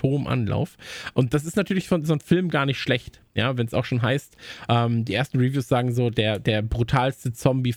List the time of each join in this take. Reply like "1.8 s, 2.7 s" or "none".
none